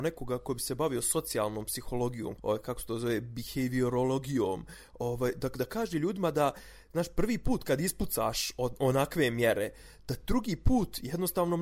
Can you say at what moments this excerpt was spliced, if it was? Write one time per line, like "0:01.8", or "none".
0:02.4